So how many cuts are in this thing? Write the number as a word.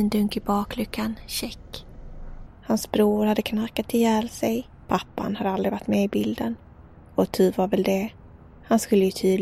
two